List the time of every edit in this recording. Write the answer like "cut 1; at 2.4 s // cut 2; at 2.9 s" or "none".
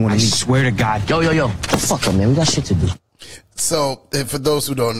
none